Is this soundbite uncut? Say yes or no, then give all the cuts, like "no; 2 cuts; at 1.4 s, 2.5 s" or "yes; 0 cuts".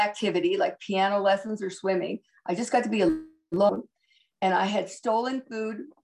yes; 0 cuts